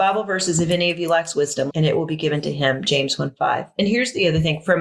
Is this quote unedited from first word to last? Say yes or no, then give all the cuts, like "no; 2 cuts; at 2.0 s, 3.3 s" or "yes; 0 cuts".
no; 1 cut; at 1.7 s